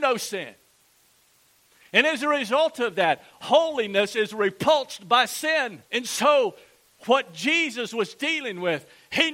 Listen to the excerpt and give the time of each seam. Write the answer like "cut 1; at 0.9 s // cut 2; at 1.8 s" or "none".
cut 1; at 5.8 s